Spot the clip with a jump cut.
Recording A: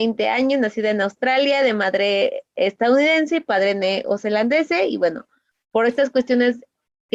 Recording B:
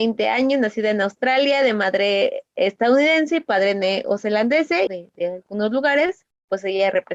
B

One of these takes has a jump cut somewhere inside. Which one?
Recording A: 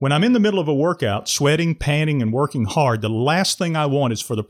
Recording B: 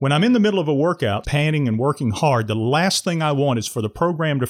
B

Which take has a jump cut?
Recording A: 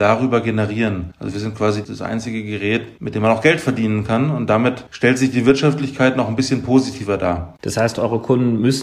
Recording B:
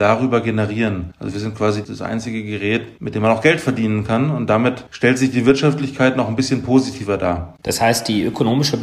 B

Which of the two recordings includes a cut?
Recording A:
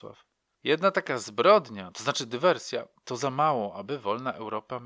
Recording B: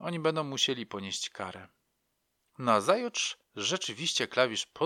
B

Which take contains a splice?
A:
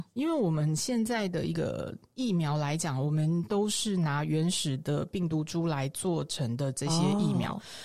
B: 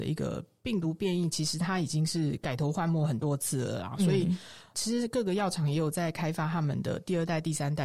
B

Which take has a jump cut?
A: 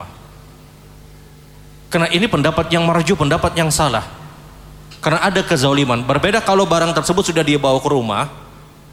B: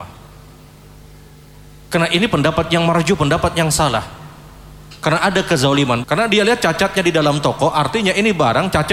B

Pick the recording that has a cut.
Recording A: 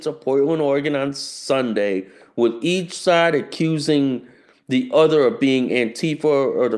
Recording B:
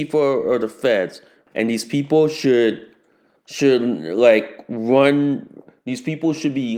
B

